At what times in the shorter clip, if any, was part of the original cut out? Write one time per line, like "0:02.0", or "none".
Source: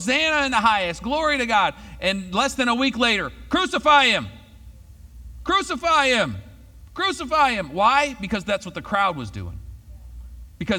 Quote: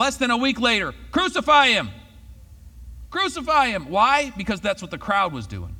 0:03.1